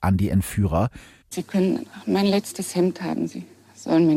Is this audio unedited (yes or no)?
no